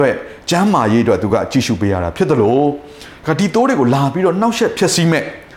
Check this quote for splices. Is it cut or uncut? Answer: uncut